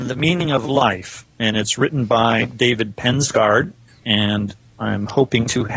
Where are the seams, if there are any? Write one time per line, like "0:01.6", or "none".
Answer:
0:04.0